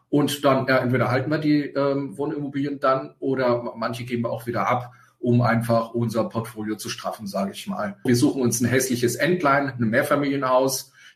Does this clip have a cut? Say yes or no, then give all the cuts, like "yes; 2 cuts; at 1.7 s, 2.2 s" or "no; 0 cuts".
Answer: yes; 1 cut; at 8.1 s